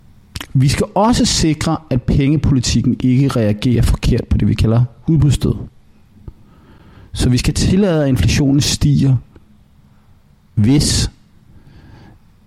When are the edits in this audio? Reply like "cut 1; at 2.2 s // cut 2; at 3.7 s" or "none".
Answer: none